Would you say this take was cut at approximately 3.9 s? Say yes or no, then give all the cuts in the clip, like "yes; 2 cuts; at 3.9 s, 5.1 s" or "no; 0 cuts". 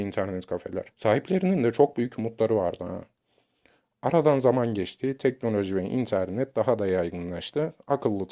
no; 1 cut; at 0.9 s